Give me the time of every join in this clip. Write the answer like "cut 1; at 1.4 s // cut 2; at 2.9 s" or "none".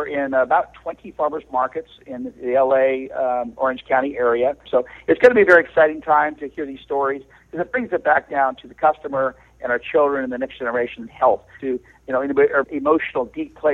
cut 1; at 4.7 s // cut 2; at 11.6 s // cut 3; at 12.6 s